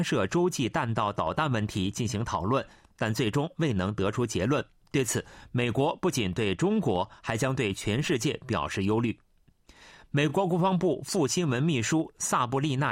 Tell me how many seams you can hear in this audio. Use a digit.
0